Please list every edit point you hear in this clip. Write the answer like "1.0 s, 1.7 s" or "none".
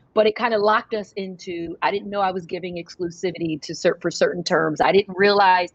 none